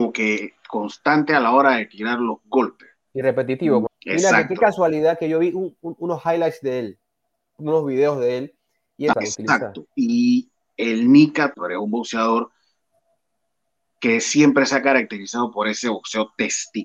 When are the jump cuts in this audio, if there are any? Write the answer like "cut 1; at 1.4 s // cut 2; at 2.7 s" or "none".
cut 1; at 3.9 s // cut 2; at 9.1 s // cut 3; at 11.5 s